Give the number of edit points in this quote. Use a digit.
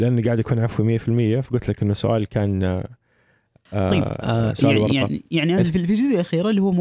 1